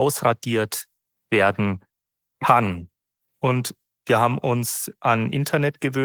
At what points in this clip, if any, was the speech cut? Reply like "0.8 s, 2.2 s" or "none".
3.2 s

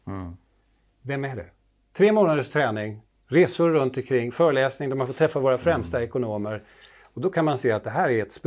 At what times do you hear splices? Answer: 1.8 s

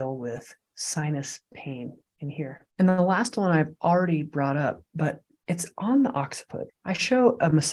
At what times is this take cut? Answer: 2.7 s, 6.7 s

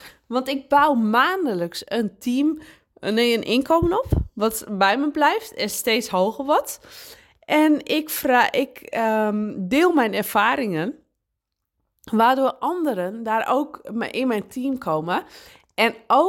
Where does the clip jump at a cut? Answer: none

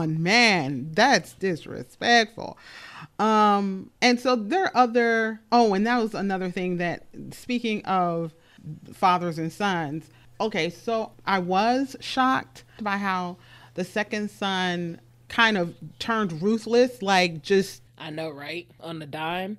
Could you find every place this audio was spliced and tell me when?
4.0 s

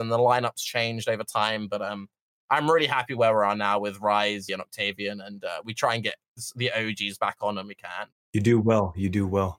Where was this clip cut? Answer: 4.5 s, 8.1 s

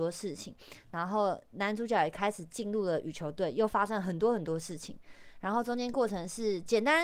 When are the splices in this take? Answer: none

